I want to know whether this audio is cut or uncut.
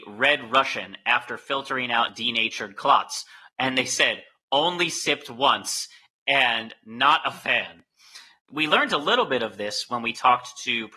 cut